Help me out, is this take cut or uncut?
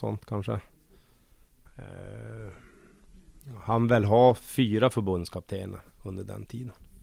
cut